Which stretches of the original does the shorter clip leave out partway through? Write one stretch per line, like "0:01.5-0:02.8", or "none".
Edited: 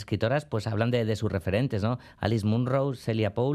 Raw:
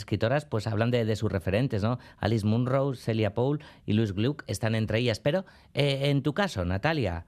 none